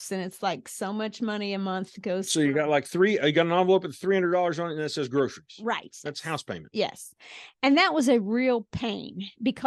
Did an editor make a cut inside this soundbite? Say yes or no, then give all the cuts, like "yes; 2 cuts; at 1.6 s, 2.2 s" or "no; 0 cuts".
yes; 1 cut; at 6.1 s